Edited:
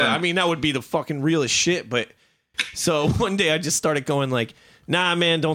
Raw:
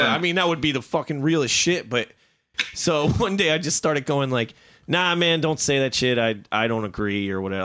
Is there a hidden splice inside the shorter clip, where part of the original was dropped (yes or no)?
no